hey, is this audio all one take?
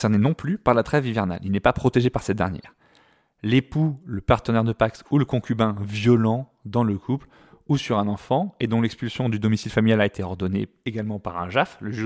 yes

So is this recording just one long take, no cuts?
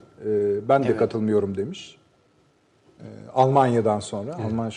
yes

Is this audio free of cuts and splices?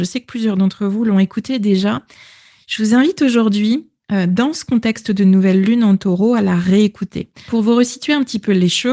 no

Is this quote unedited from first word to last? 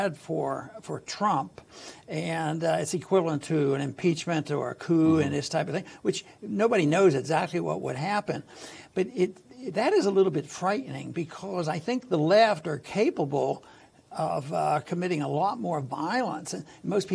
yes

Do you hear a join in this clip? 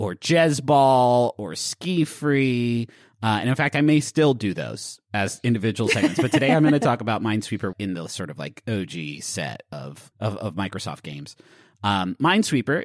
yes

